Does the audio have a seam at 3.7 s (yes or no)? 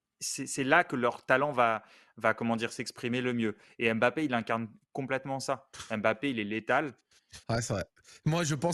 no